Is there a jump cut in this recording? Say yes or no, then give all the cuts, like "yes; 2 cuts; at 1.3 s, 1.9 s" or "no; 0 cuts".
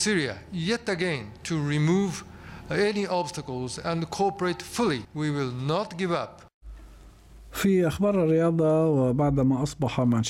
no; 0 cuts